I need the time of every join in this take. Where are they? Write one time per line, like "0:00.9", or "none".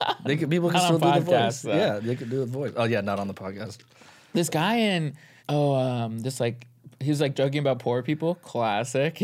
0:05.4
0:07.3